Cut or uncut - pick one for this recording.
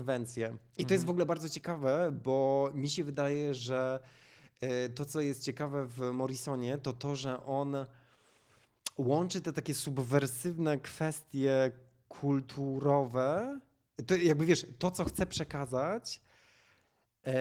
uncut